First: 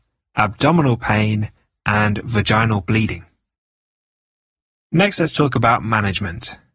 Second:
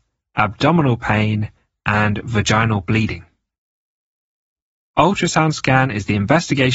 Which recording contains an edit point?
second; 1 cut; at 4.8 s

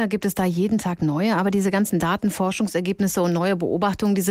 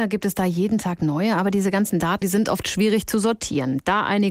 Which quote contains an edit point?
second; 1 cut; at 2.2 s

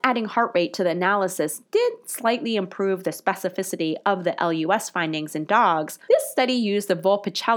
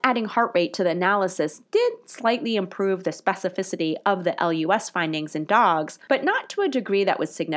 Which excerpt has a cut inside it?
first; 1 cut; at 6.1 s

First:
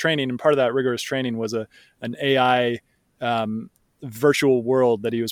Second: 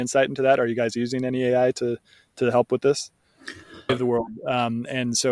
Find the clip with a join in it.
second; 1 cut; at 3.9 s

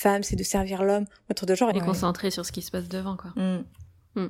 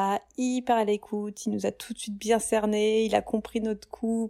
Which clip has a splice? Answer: first; 1 cut; at 1.7 s

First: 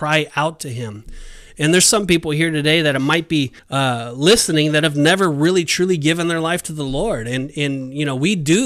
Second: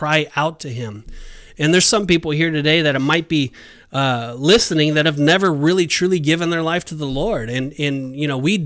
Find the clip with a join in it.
first; 1 cut; at 3.6 s

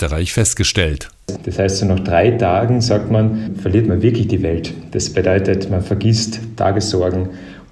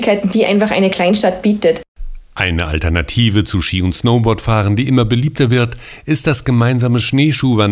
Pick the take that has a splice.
first; 1 cut; at 1.4 s

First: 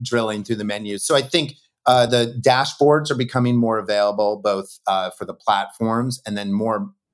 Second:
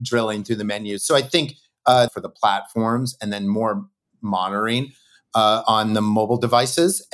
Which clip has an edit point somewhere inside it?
second; 1 cut; at 2.1 s

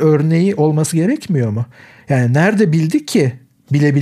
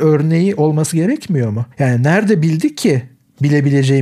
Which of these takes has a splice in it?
second; 1 cut; at 1.7 s

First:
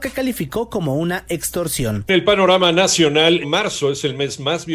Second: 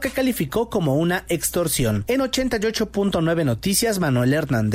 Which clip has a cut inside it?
first; 2 cuts; at 2.1 s, 3.4 s

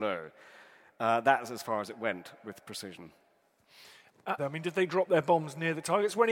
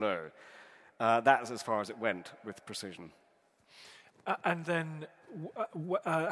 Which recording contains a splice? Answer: first; 1 cut; at 4.4 s

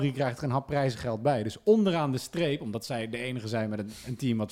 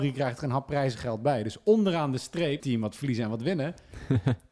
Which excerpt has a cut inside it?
second; 1 cut; at 2.6 s

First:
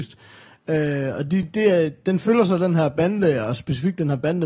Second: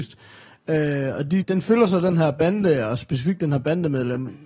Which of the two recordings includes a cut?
second; 1 cut; at 1.4 s

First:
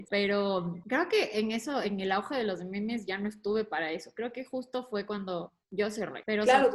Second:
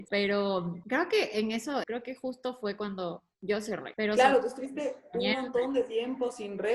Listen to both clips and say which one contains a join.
second; 1 cut; at 1.8 s

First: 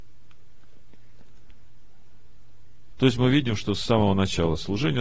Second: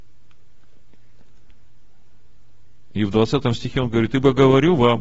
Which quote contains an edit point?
first; 1 cut; at 2.9 s

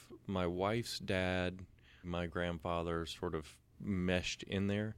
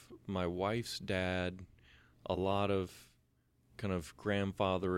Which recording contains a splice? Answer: first; 2 cuts; at 2.0 s, 3.7 s

